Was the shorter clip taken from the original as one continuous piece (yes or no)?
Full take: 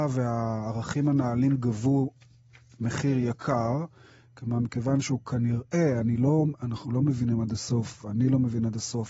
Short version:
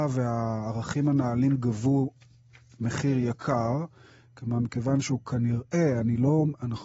yes